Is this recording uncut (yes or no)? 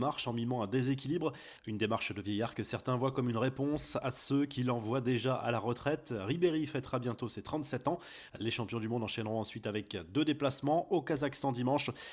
no